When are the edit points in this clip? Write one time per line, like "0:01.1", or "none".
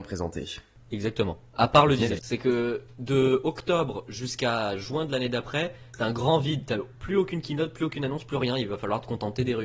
0:02.2